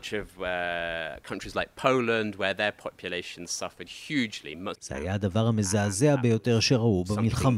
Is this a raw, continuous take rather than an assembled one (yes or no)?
no